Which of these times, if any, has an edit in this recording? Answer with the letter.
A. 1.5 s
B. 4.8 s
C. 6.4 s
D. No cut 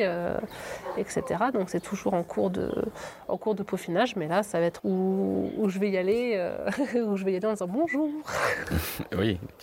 B